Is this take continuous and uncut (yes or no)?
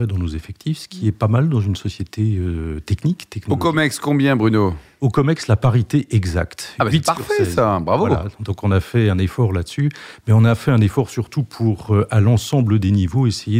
yes